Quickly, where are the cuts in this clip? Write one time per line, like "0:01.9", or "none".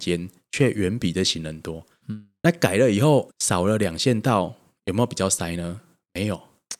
0:02.0
0:03.3